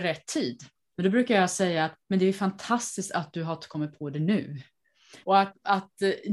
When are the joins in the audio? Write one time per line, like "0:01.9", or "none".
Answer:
0:00.9
0:02.0
0:05.2